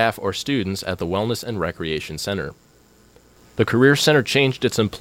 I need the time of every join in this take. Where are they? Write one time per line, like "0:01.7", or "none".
0:03.4